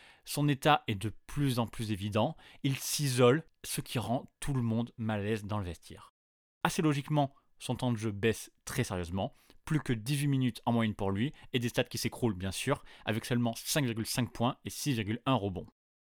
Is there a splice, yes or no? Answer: no